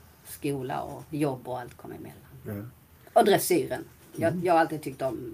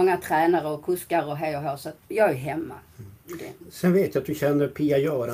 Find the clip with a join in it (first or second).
second